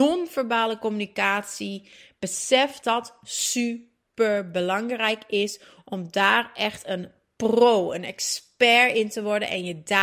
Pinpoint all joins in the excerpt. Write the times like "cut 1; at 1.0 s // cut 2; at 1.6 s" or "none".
cut 1; at 2.8 s